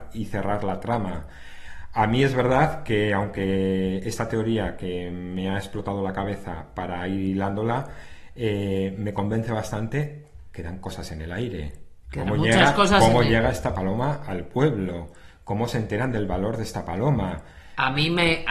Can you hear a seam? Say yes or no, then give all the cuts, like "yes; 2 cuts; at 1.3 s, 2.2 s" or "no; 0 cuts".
no; 0 cuts